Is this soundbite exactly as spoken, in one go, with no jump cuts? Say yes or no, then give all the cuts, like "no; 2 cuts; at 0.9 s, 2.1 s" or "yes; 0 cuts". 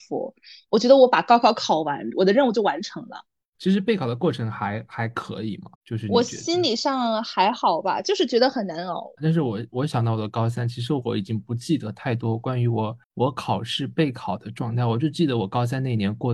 no; 3 cuts; at 5.7 s, 9.2 s, 13.0 s